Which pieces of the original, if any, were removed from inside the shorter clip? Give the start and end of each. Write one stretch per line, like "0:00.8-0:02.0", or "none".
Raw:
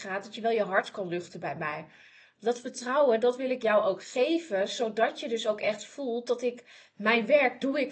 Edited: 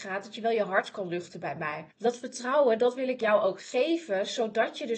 0:01.9-0:02.3